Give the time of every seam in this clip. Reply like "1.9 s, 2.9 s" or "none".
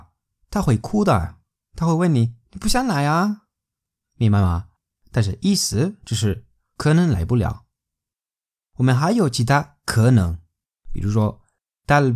none